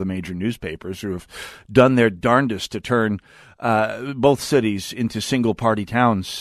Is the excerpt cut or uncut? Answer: uncut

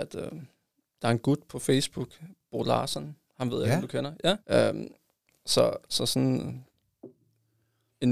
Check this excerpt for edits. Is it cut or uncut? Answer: cut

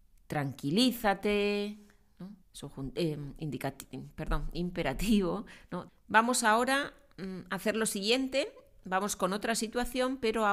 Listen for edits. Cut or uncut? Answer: cut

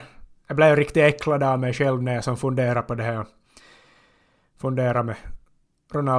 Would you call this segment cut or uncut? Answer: uncut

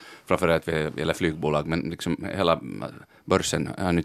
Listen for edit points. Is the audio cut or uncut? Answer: uncut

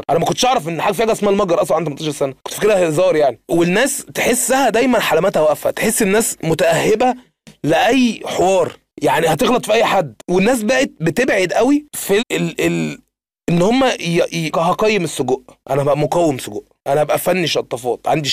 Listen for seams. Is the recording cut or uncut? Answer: cut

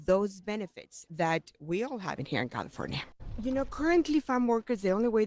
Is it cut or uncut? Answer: cut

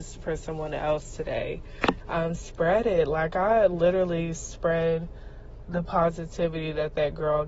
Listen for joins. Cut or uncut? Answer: cut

